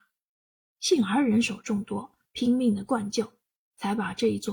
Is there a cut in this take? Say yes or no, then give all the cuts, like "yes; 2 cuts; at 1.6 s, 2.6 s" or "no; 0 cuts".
no; 0 cuts